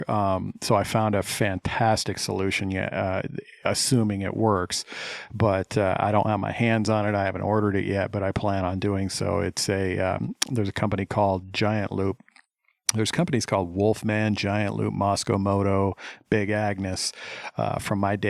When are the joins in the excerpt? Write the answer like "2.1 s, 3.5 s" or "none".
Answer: none